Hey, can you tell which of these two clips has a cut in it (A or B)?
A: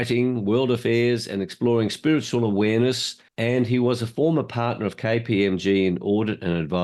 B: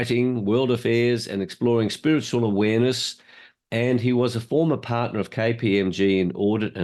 A